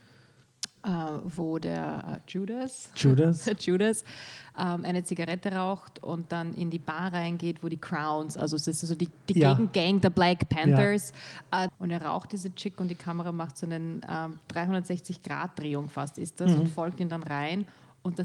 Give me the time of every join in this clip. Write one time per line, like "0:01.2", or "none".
0:11.7